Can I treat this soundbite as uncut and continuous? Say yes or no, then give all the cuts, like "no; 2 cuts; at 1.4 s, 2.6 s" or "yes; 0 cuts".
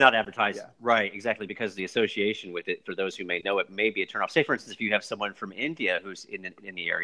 yes; 0 cuts